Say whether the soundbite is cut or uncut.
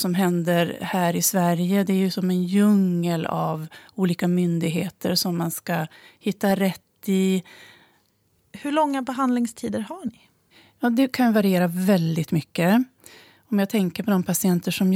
uncut